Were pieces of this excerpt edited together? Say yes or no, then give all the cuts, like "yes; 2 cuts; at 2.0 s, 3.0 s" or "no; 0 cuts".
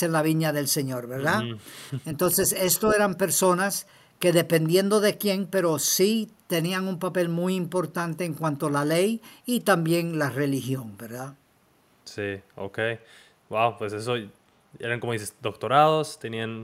no; 0 cuts